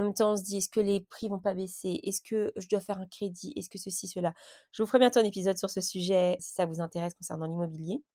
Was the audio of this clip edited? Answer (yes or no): yes